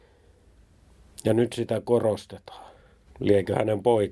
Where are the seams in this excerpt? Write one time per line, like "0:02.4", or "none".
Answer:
0:03.1